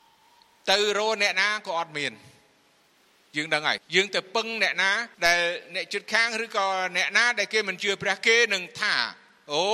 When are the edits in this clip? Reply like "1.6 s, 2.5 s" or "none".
3.8 s, 5.1 s